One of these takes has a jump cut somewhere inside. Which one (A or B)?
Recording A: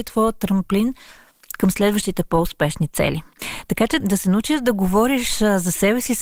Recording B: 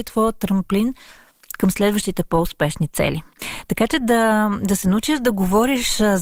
A